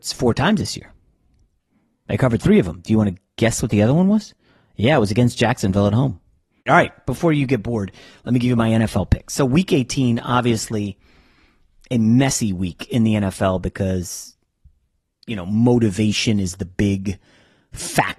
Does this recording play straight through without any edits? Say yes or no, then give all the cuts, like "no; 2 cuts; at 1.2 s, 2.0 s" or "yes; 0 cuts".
no; 1 cut; at 6.6 s